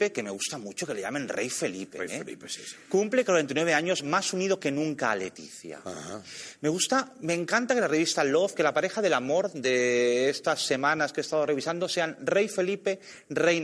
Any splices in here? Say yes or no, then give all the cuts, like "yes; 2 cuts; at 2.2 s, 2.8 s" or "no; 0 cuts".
no; 0 cuts